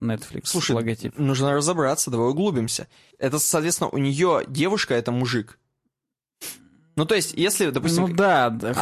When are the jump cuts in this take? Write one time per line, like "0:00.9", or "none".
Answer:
0:03.1